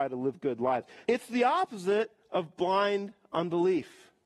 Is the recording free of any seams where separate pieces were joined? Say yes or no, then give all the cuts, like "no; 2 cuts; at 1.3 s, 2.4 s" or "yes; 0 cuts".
no; 1 cut; at 1.0 s